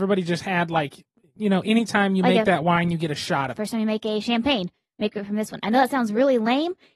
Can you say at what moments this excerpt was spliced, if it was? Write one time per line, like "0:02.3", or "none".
0:03.6